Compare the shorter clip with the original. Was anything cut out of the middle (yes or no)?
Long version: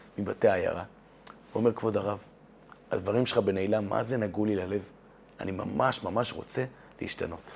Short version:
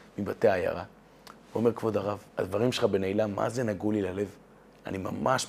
yes